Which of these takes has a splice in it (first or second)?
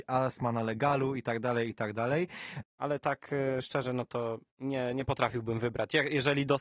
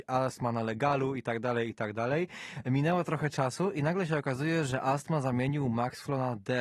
first